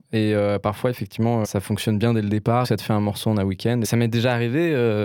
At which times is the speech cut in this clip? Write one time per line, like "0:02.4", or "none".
0:01.4
0:02.6
0:03.8